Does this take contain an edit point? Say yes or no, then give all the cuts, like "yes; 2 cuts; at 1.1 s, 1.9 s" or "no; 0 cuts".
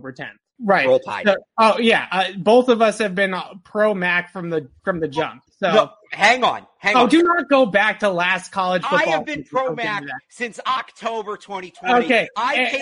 no; 0 cuts